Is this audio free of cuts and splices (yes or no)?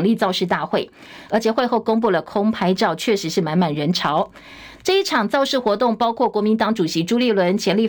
no